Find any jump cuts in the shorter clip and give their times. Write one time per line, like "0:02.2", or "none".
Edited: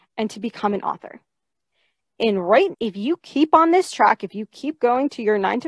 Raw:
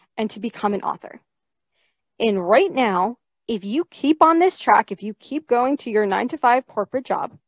0:02.7